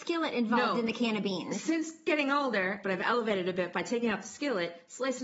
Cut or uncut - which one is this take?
cut